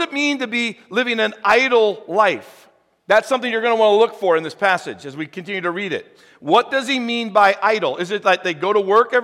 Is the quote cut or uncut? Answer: uncut